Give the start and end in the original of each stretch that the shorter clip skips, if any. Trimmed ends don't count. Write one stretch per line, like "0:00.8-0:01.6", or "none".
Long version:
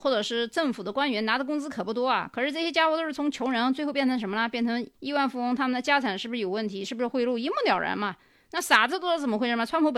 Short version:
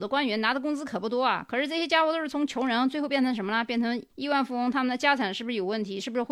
none